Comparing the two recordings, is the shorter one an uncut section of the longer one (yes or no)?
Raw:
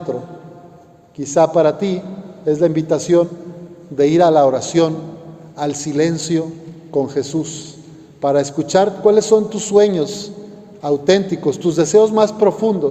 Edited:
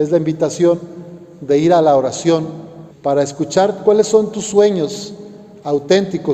no